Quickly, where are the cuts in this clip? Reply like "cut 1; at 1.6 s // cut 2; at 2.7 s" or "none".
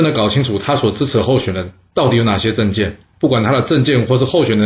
cut 1; at 3.1 s